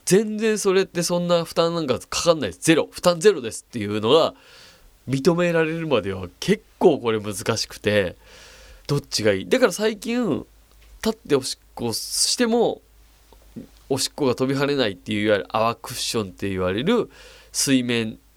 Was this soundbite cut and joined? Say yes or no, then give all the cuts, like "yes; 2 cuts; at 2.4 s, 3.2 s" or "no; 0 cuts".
yes; 1 cut; at 8.8 s